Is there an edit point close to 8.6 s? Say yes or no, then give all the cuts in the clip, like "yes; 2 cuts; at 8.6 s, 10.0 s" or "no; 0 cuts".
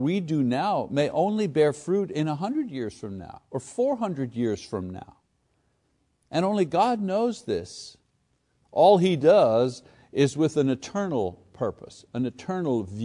yes; 1 cut; at 8.6 s